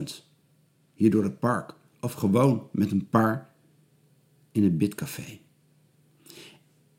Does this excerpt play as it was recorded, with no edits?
no; 1 cut; at 1.9 s

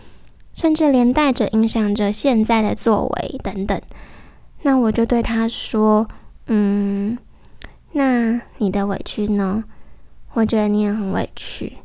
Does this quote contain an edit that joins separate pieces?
no; 0 cuts

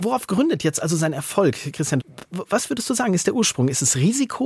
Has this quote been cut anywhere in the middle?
no; 0 cuts

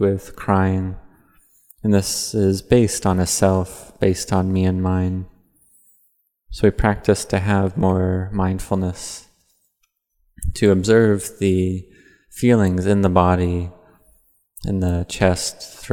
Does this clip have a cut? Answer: no; 0 cuts

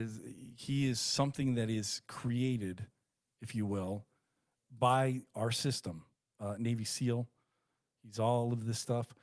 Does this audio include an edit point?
yes; 1 cut; at 6.2 s

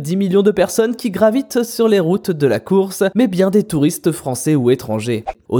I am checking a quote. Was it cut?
yes; 1 cut; at 3.1 s

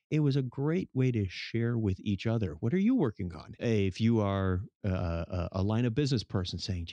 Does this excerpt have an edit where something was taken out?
yes; 1 cut; at 3.6 s

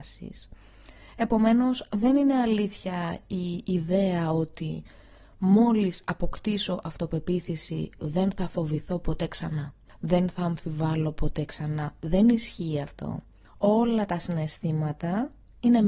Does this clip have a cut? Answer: no; 0 cuts

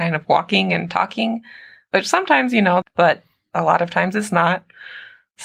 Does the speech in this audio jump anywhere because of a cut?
yes; 1 cut; at 2.8 s

